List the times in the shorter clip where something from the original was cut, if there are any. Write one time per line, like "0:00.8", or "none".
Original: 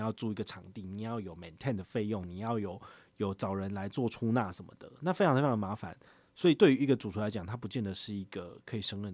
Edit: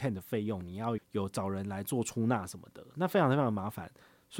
0:01.0